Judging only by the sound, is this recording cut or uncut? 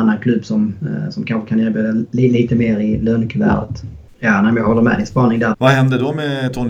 cut